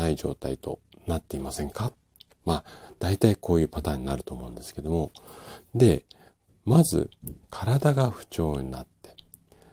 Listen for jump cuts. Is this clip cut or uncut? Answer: cut